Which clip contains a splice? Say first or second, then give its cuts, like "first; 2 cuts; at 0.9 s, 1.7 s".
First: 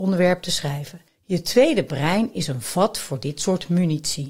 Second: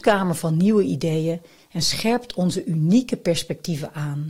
first; 1 cut; at 1.1 s